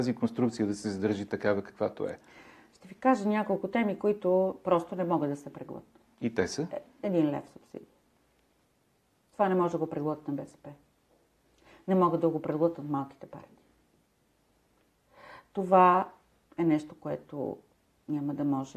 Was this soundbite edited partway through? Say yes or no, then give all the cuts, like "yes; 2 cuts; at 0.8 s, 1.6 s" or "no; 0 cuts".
no; 0 cuts